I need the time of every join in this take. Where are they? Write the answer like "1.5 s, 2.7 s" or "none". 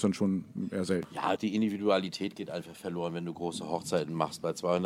1.4 s